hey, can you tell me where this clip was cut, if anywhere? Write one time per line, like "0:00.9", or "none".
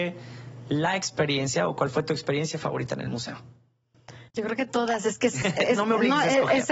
0:04.3
0:05.4

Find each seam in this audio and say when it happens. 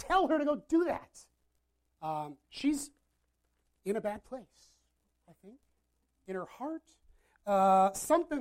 0:01.9

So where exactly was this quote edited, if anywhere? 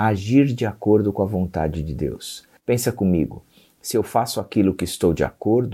0:02.6

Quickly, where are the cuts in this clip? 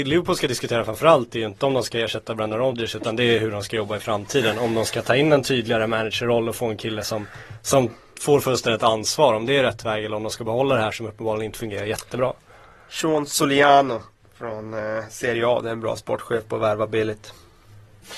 none

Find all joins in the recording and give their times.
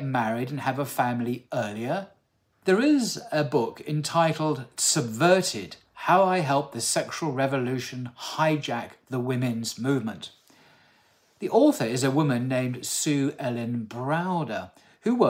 0:02.5

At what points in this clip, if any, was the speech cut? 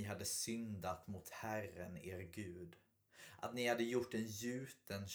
none

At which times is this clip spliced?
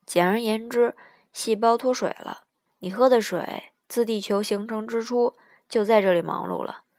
0:02.7

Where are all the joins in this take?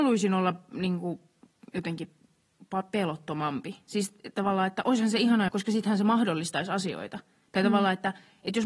0:05.5

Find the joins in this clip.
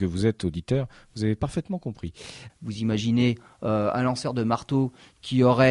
0:02.5

